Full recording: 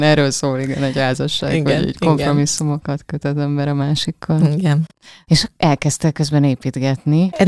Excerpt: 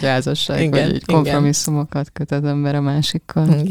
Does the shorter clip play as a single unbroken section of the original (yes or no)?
yes